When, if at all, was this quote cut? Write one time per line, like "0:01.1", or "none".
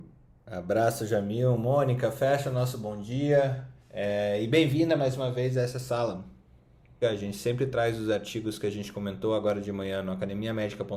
0:03.8
0:07.0